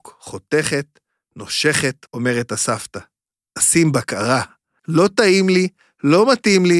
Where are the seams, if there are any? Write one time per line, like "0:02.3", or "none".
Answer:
0:02.1
0:04.8